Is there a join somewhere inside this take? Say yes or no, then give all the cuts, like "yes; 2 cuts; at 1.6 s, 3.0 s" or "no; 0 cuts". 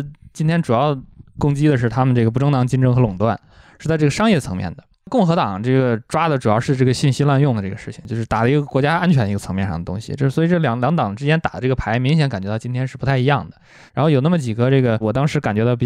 no; 0 cuts